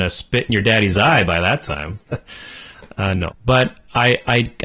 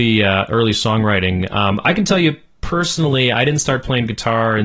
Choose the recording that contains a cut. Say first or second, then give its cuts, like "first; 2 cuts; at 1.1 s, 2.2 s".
first; 2 cuts; at 2.0 s, 3.3 s